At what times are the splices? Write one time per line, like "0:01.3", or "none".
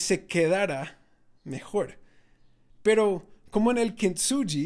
0:02.7